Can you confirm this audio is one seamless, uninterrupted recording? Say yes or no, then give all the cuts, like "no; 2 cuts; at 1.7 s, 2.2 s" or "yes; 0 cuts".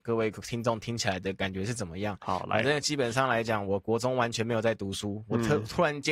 yes; 0 cuts